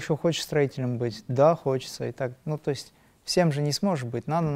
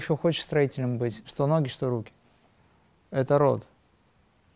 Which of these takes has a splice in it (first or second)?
second